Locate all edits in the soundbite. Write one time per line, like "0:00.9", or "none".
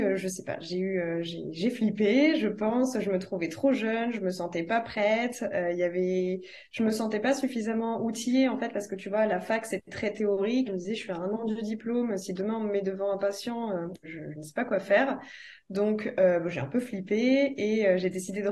0:10.7
0:14.0